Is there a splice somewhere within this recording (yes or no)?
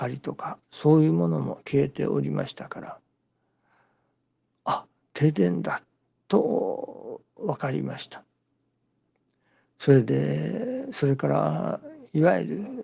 no